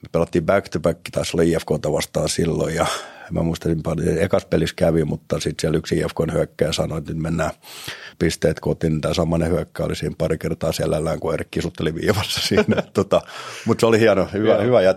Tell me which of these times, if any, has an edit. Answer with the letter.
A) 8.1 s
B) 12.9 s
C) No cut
A